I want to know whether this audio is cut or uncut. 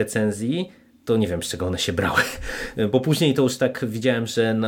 uncut